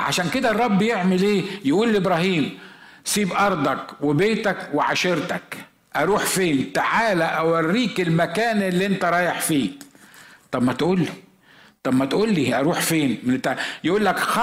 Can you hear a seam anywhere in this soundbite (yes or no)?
no